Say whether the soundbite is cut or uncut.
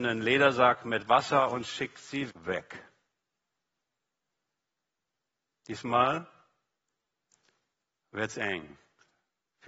cut